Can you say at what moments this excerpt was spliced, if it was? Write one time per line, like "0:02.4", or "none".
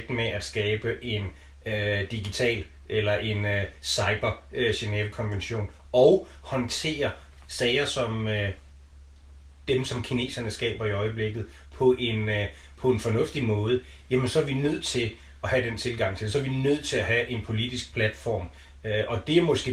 none